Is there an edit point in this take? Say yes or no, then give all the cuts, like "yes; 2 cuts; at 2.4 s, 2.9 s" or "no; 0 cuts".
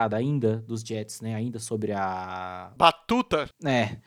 yes; 1 cut; at 2.8 s